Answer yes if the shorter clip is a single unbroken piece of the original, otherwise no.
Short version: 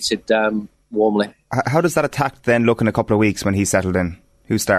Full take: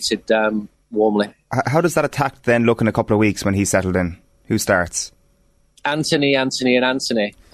yes